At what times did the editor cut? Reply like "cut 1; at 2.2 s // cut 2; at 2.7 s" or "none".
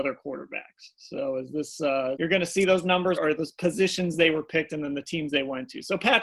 cut 1; at 2.2 s // cut 2; at 3.2 s

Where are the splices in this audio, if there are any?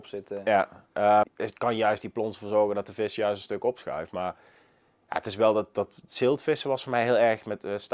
cut 1; at 1.2 s

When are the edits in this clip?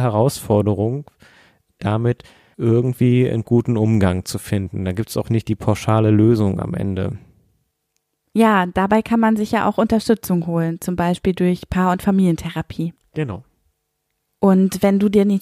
none

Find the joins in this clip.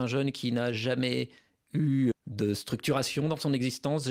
cut 1; at 2.1 s

